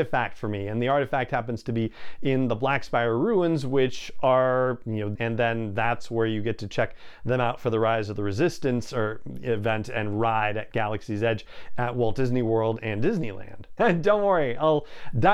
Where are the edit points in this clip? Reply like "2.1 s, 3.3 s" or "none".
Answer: 5.2 s, 13.8 s